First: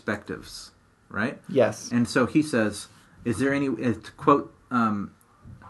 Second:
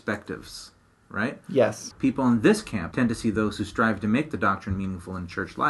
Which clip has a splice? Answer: second; 2 cuts; at 1.9 s, 2.9 s

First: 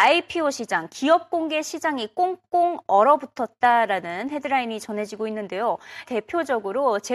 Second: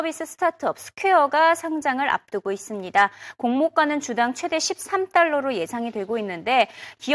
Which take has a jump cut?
first; 1 cut; at 6.1 s

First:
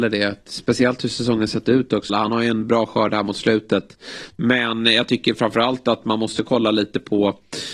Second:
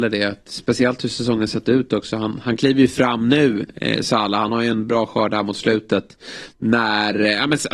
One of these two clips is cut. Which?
first; 2 cuts; at 2.1 s, 4.3 s

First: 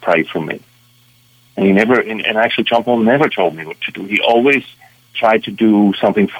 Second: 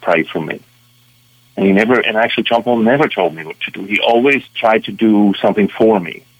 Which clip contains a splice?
second; 2 cuts; at 2.0 s, 4.5 s

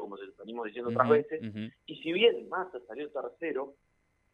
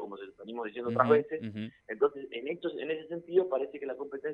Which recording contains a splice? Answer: first; 1 cut; at 1.7 s

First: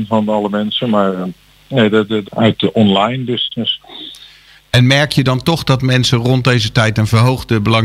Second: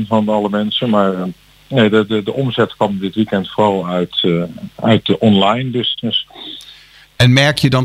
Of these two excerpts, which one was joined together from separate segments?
first; 1 cut; at 2.2 s

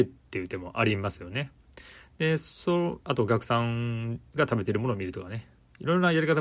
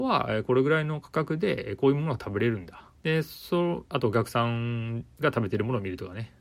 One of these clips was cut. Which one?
second; 1 cut; at 3.0 s

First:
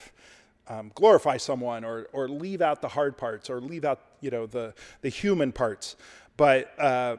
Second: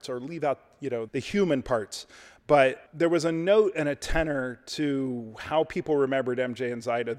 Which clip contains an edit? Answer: second; 2 cuts; at 1.1 s, 2.9 s

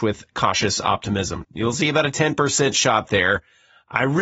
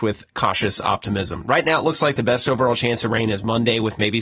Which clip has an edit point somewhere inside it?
first; 1 cut; at 1.4 s

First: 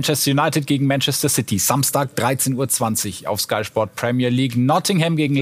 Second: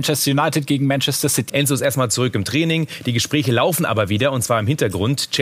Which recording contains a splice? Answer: second; 1 cut; at 1.5 s

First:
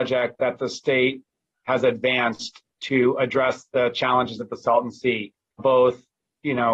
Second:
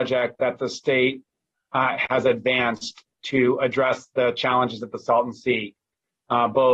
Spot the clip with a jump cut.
first; 2 cuts; at 1.7 s, 5.6 s

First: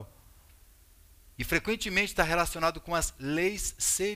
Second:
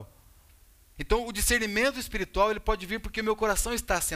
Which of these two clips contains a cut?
second; 1 cut; at 1.0 s

